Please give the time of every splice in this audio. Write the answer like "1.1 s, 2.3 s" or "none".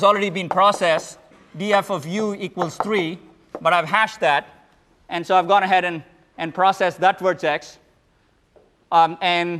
none